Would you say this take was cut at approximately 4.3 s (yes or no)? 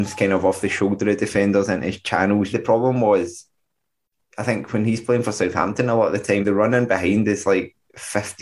no